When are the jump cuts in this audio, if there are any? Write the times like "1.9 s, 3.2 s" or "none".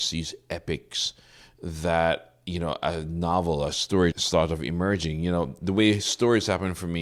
4.1 s